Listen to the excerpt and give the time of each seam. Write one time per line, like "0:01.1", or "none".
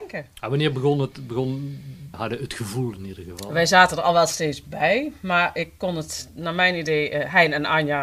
0:02.1